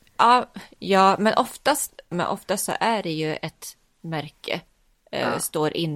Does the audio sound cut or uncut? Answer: cut